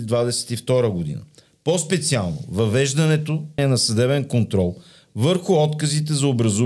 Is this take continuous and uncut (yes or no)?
no